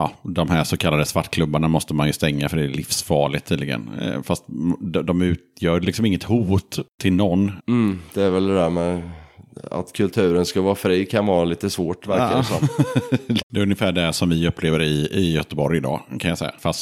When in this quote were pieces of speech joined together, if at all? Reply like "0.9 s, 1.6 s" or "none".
7.6 s, 13.4 s